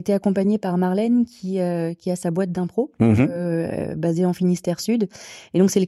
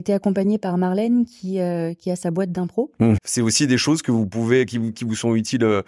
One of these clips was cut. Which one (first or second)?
second